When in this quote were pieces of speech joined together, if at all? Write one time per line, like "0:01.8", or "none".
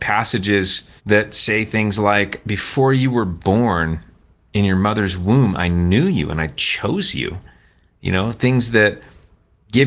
0:01.0